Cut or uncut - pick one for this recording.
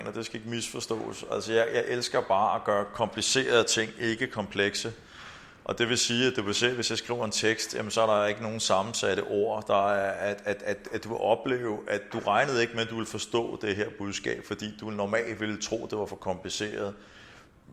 uncut